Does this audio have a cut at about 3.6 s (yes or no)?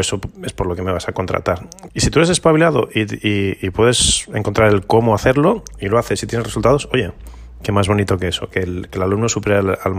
no